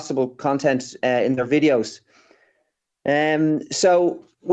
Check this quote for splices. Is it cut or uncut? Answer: uncut